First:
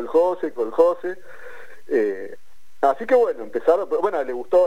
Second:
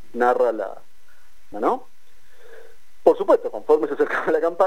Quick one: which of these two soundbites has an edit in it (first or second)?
second